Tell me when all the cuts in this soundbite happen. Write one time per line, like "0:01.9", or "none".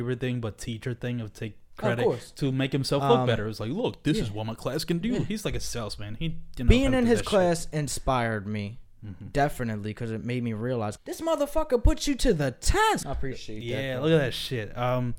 0:11.0
0:13.0